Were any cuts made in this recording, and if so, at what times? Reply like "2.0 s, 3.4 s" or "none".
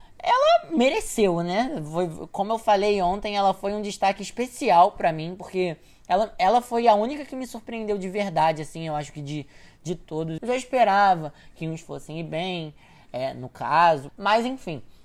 10.4 s, 14.1 s